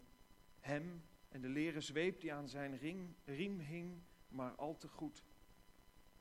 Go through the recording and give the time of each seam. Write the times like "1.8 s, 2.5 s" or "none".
none

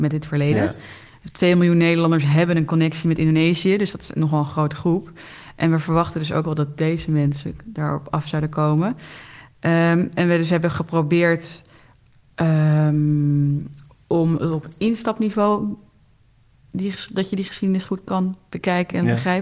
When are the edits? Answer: none

